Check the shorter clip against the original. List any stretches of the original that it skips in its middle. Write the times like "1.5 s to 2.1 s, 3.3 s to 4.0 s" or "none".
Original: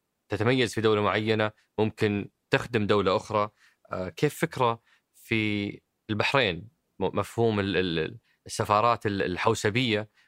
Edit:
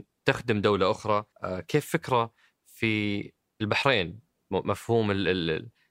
3.6 s to 3.8 s